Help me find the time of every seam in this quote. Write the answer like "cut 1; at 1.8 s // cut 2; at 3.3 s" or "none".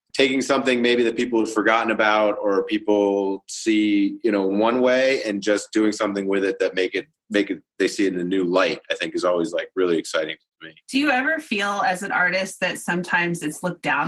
cut 1; at 10.8 s